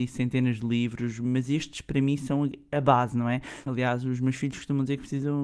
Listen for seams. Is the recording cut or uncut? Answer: cut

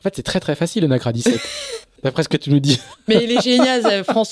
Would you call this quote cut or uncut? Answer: uncut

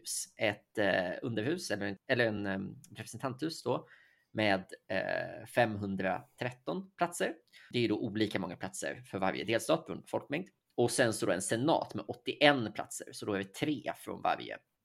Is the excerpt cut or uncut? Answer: uncut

